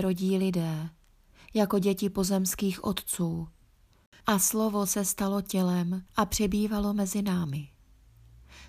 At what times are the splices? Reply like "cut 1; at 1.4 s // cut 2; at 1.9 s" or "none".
cut 1; at 4.2 s // cut 2; at 6.1 s